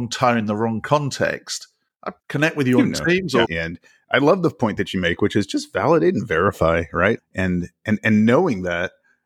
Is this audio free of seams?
no; 3 cuts; at 2.2 s, 3.4 s, 7.2 s

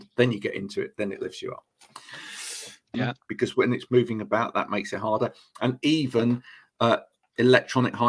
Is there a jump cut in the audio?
yes; 1 cut; at 2.9 s

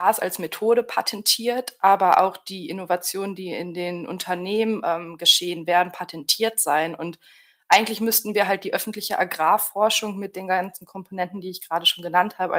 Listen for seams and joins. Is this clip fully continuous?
yes; 0 cuts

